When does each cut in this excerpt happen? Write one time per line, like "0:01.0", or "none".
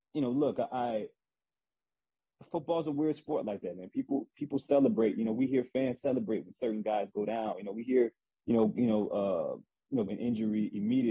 0:10.1